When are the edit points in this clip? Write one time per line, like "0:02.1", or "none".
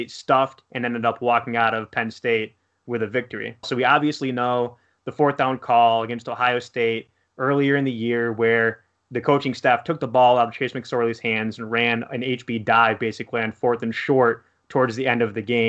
0:03.6